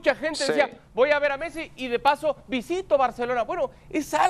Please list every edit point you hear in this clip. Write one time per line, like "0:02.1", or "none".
none